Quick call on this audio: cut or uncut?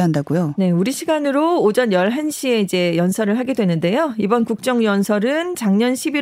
uncut